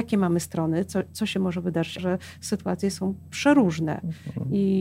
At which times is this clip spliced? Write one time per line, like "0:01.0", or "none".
0:02.0